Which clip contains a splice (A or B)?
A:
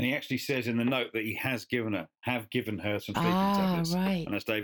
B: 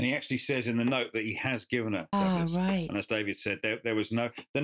B